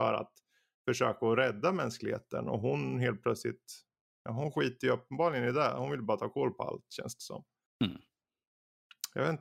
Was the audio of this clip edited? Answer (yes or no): no